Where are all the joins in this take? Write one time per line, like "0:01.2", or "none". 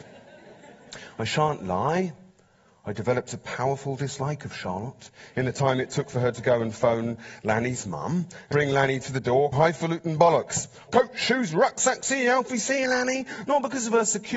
0:08.5
0:09.5
0:10.9

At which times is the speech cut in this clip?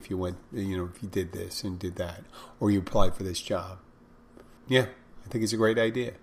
0:04.6

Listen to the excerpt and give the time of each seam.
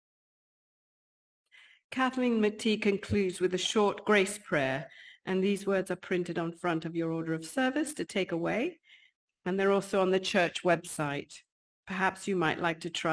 none

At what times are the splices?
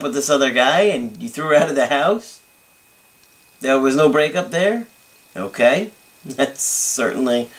none

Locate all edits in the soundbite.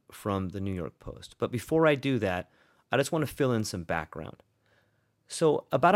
none

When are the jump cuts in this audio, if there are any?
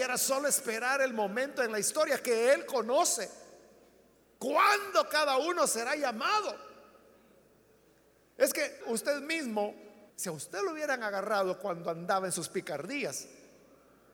0:08.8
0:10.1

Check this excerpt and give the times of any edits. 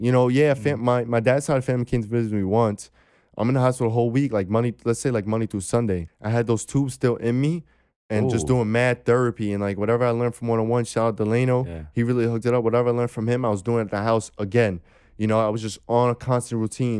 0:06.1

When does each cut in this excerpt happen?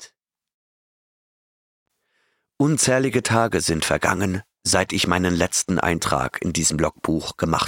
none

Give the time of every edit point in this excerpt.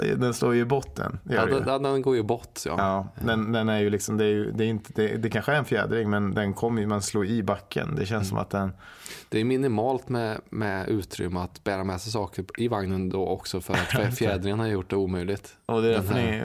none

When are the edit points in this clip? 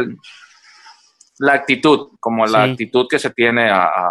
0:02.2

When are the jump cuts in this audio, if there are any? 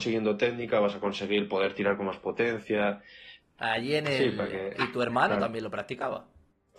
0:03.4
0:04.7

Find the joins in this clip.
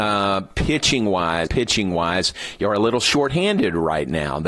0:01.5

